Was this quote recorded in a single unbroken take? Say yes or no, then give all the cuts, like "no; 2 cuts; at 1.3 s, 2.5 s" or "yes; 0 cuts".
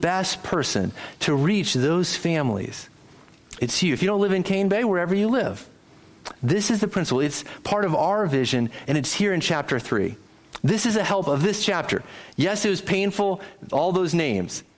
yes; 0 cuts